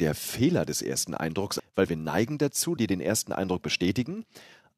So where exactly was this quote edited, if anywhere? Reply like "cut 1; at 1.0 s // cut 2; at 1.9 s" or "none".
cut 1; at 1.6 s // cut 2; at 2.8 s